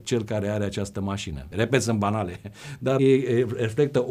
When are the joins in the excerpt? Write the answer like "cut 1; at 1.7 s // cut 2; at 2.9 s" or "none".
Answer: cut 1; at 1.5 s // cut 2; at 3.0 s